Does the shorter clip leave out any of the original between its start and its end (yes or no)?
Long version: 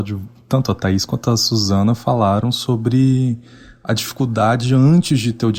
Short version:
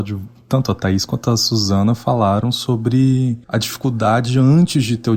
yes